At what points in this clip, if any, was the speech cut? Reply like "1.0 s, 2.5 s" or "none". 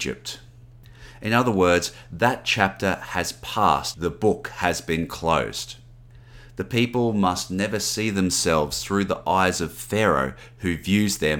3.9 s